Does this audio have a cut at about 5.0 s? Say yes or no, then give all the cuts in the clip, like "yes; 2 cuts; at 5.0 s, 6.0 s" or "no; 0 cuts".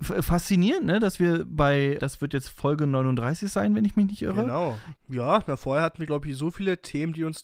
yes; 2 cuts; at 2.0 s, 5.0 s